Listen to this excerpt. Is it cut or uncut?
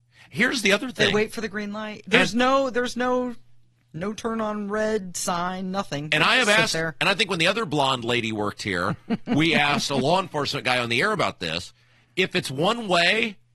uncut